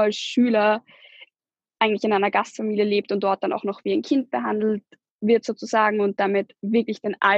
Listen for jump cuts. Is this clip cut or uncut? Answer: uncut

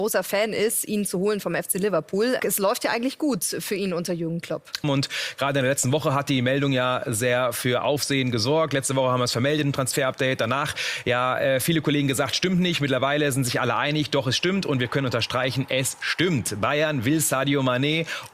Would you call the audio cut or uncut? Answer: cut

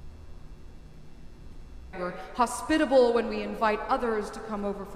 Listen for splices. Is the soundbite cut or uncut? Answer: cut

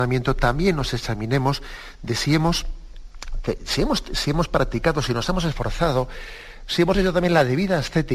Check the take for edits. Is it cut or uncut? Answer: uncut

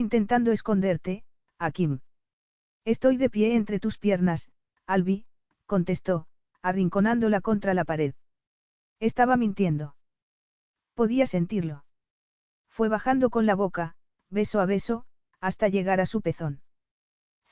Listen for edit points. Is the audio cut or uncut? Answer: uncut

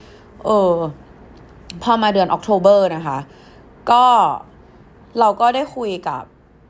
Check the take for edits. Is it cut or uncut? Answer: uncut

